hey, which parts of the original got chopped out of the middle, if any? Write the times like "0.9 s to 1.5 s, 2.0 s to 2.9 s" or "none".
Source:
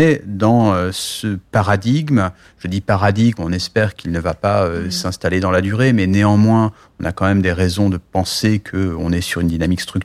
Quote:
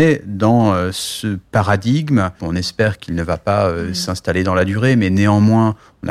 2.4 s to 3.4 s